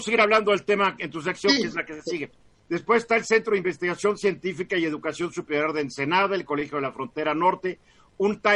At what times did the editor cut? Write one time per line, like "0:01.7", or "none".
0:02.6